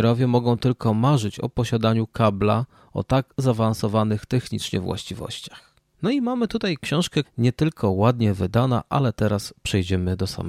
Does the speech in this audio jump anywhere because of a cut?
yes; 2 cuts; at 5.9 s, 7.2 s

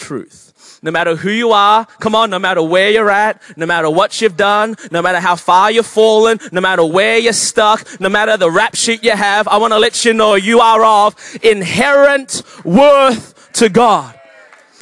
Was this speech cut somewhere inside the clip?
no; 0 cuts

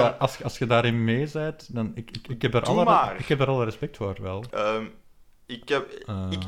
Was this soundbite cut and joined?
yes; 1 cut; at 4.5 s

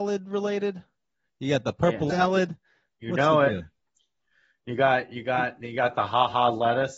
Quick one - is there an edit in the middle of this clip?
yes; 1 cut; at 2.1 s

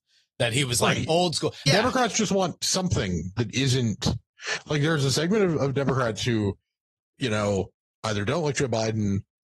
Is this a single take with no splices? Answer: no; 1 cut; at 1.7 s

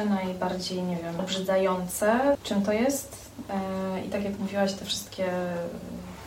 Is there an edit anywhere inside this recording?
yes; 2 cuts; at 1.2 s, 2.4 s

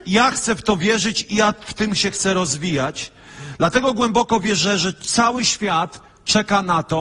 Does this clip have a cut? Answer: no; 0 cuts

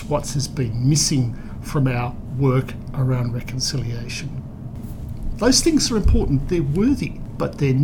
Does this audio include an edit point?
yes; 1 cut; at 5.3 s

